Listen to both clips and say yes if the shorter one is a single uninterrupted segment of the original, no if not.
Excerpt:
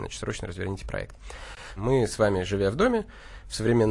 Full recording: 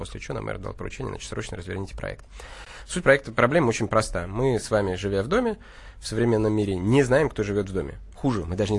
no